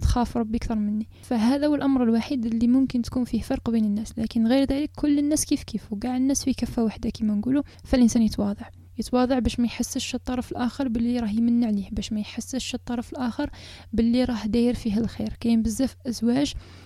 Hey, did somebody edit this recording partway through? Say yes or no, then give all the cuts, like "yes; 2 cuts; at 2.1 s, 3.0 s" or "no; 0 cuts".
no; 0 cuts